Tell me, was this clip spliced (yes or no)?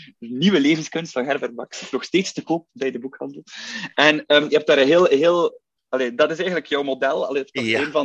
no